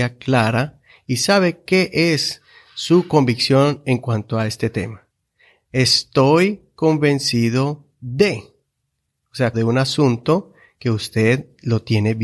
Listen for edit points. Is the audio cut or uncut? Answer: cut